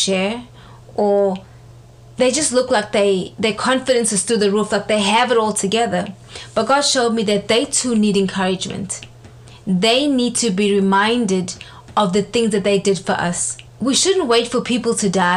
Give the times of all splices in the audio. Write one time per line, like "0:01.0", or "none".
0:03.3
0:13.7